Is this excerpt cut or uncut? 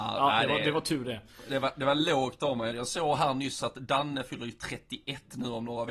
cut